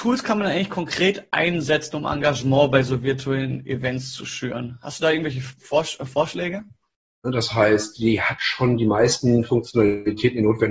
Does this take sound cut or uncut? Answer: cut